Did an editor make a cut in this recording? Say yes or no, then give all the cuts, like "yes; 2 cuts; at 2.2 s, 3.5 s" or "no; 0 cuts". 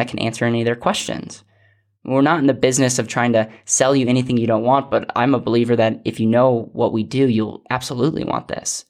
no; 0 cuts